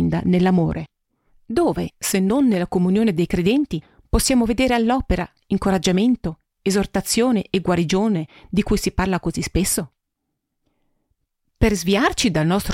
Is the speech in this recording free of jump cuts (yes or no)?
yes